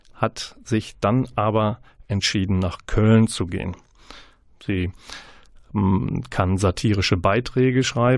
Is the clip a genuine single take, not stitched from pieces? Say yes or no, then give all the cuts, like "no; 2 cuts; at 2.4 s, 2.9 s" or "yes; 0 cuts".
no; 1 cut; at 4.4 s